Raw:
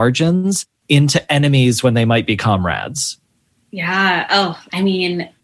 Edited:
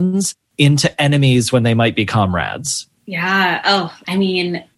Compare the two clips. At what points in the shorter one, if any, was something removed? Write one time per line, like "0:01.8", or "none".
0:03.0